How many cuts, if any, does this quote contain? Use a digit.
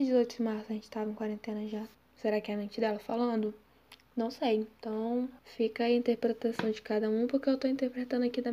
2